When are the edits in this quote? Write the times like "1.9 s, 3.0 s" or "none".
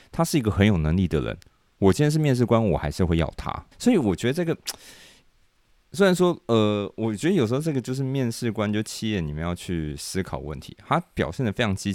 3.7 s